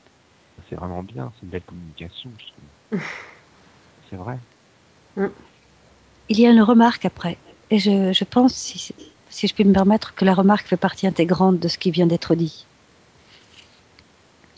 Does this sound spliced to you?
no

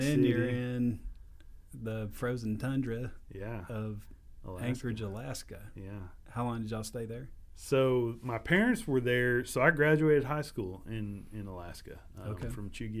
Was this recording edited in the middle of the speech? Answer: no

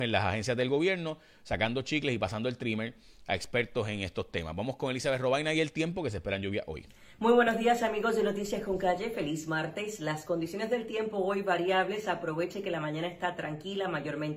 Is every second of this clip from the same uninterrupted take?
yes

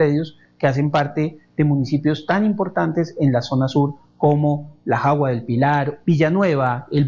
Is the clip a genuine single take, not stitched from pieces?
no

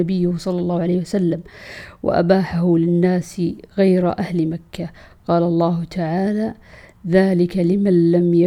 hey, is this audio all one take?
yes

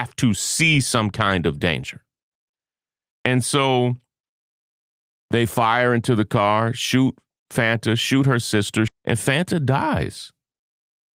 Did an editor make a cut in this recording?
yes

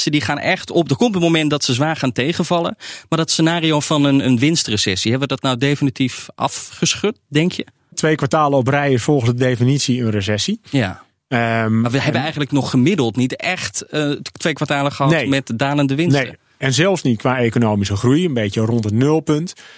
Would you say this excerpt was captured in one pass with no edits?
yes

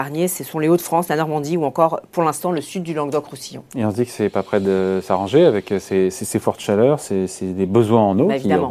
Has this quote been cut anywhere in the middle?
no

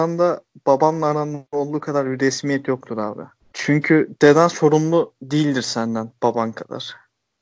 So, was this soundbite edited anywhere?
no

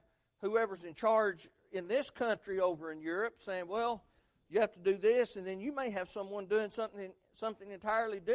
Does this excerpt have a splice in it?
no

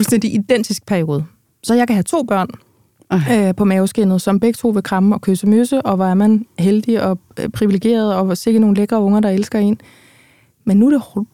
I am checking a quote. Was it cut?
no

